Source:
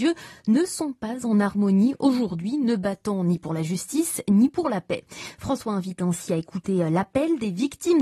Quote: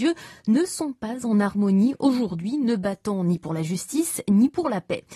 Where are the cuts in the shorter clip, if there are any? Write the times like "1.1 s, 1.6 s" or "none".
none